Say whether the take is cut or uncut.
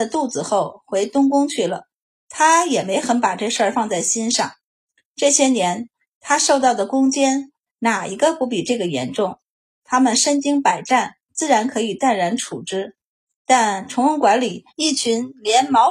uncut